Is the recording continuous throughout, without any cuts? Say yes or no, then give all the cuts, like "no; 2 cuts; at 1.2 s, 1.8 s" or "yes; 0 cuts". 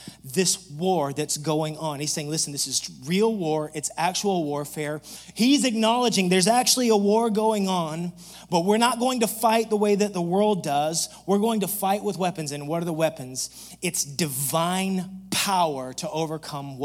no; 1 cut; at 5.3 s